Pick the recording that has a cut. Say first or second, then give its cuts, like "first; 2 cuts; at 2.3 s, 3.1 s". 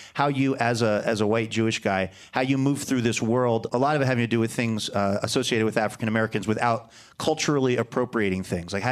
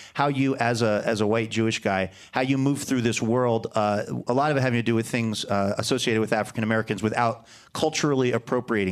first; 1 cut; at 3.7 s